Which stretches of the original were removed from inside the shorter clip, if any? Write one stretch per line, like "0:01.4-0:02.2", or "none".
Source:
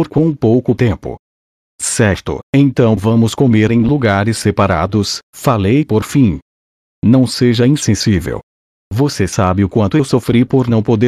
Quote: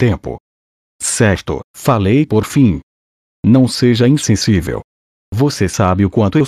0:02.4-0:05.2